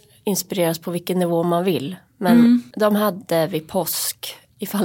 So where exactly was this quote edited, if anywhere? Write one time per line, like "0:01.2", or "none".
0:02.7